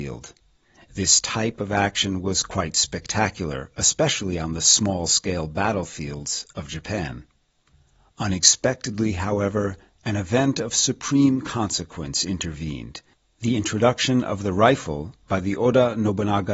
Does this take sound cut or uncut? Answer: uncut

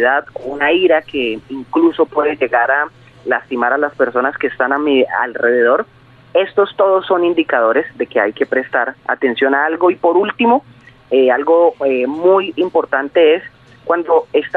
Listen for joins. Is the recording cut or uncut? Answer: uncut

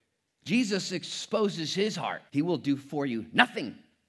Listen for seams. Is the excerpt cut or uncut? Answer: cut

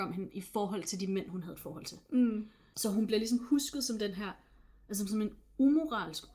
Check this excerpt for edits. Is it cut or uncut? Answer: uncut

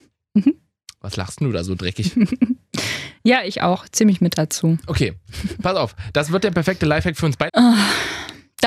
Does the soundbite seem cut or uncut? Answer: cut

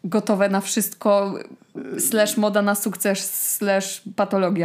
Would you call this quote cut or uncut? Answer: uncut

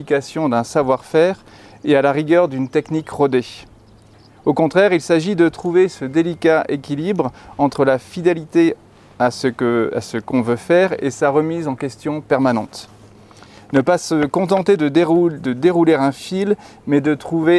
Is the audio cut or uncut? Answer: uncut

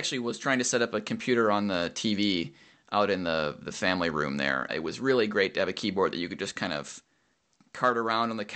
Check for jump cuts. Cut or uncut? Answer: cut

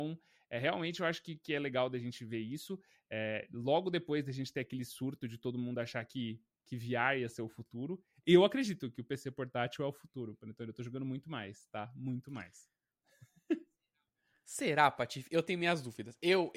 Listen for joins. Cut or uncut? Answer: uncut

